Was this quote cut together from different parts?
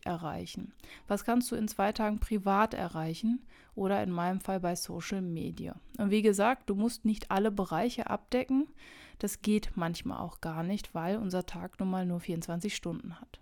no; 0 cuts

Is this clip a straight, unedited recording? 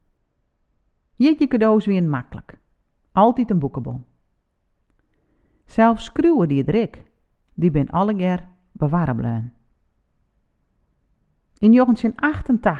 no; 1 cut; at 7.5 s

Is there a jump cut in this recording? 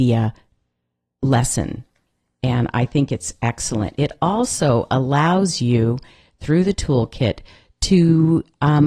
no; 0 cuts

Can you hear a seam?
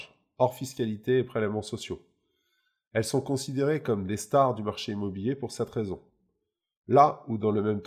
no; 0 cuts

